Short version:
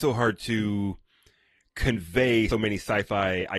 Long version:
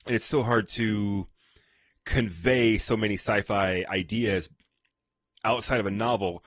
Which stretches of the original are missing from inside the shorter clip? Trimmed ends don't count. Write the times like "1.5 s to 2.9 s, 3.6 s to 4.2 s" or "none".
2.8 s to 2.9 s